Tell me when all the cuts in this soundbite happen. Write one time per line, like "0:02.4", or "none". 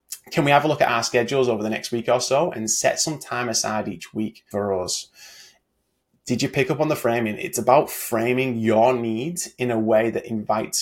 0:04.5